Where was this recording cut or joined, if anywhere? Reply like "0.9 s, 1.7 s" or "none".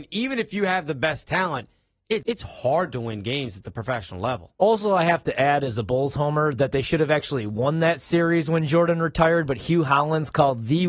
2.2 s